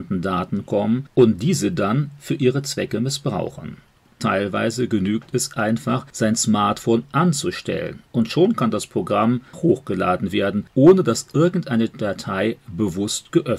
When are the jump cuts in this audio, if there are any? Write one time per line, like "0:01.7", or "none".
0:04.1
0:09.5